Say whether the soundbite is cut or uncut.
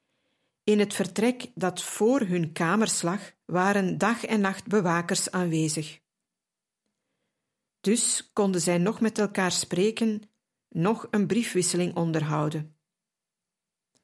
cut